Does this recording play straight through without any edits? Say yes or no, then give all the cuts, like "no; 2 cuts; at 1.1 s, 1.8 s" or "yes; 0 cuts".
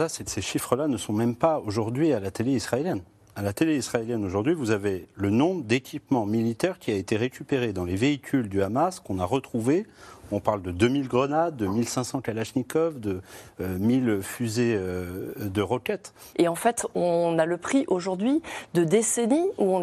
no; 1 cut; at 16.3 s